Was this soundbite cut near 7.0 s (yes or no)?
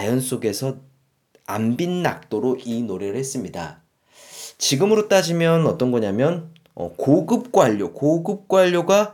no